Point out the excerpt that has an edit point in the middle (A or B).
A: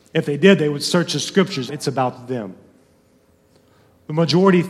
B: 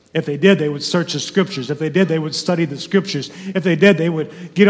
A